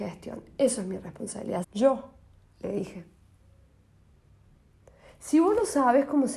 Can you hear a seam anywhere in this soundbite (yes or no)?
yes